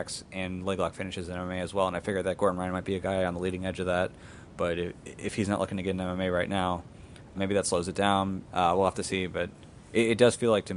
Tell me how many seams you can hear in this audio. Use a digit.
2